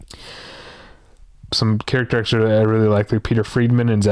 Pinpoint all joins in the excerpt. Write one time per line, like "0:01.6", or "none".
0:01.5